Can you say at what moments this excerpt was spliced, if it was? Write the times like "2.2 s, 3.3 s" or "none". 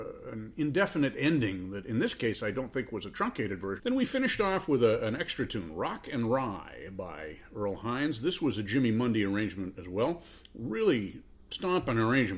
3.8 s